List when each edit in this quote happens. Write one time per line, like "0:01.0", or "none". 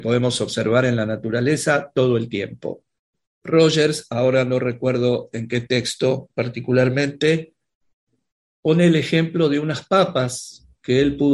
0:03.3